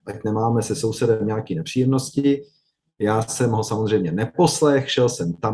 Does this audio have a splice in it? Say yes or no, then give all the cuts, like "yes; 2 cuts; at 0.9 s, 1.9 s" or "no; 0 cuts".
no; 0 cuts